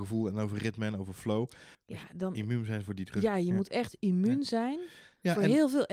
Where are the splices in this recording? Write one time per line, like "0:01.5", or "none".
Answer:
0:01.7